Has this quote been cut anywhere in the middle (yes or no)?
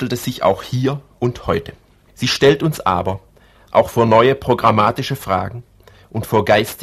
yes